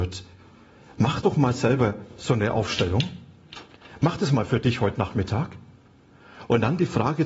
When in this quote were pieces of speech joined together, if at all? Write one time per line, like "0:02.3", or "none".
none